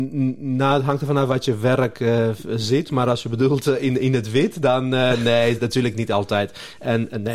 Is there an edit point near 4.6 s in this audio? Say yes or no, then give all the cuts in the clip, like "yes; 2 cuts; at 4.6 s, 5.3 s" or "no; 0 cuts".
no; 0 cuts